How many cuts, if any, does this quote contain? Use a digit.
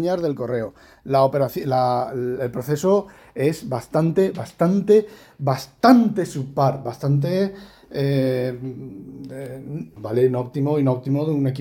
2